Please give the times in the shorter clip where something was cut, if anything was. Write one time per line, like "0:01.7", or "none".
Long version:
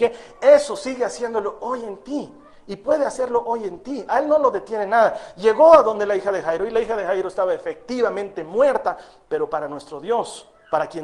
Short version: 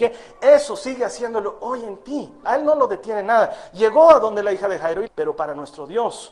0:02.4
0:05.1